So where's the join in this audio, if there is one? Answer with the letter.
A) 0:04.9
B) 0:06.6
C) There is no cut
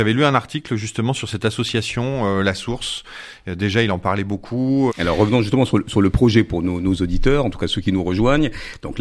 A